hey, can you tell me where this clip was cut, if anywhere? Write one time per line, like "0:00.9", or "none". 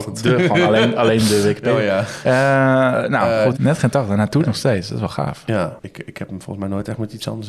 0:02.2
0:03.5
0:05.8